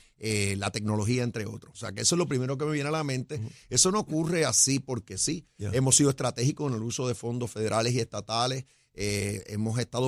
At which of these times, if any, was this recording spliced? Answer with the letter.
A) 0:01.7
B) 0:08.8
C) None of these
A